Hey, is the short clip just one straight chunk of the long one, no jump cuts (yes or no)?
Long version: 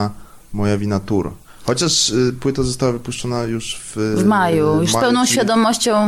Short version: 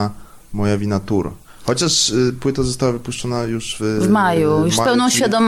no